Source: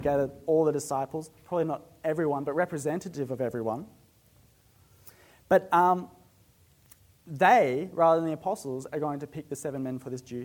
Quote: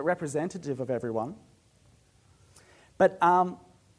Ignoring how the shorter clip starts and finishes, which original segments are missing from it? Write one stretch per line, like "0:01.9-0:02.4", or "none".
none